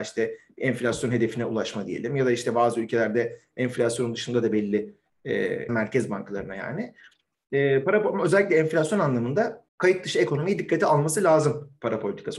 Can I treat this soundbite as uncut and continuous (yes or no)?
no